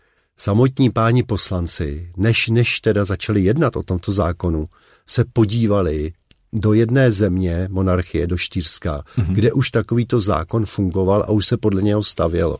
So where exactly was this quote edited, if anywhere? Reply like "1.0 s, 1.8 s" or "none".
none

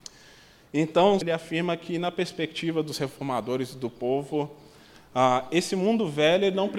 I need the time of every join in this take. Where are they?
1.2 s

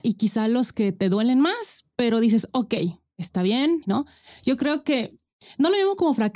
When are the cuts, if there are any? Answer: 3.8 s

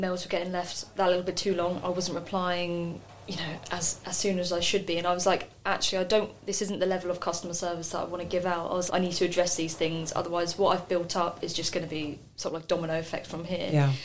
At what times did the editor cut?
8.9 s

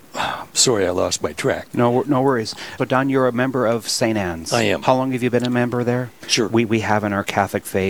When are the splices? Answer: 2.8 s, 6.2 s

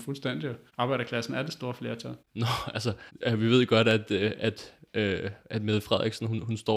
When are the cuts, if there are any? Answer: 2.2 s

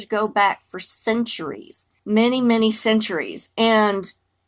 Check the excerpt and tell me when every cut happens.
2.0 s

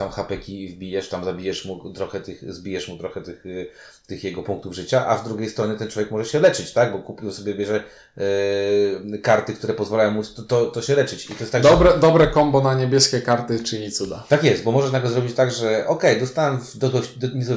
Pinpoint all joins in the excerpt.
none

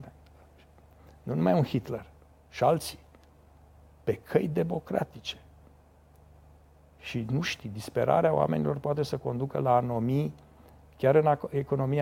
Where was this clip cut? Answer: none

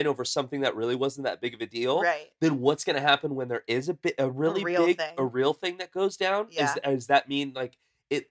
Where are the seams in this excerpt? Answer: none

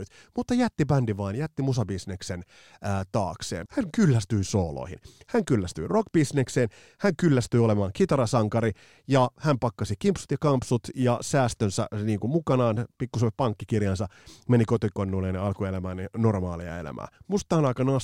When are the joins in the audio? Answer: 3.7 s

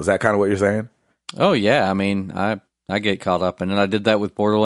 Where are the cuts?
none

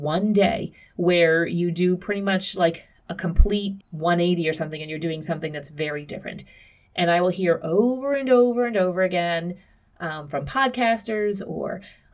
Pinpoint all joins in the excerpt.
3.8 s

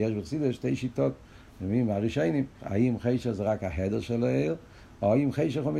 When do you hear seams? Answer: 2.6 s

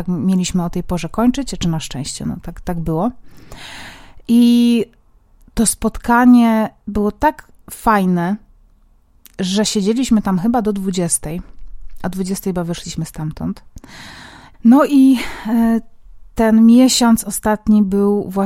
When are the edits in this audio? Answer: 14.5 s

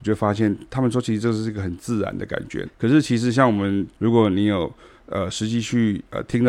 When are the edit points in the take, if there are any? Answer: 2.6 s, 3.9 s

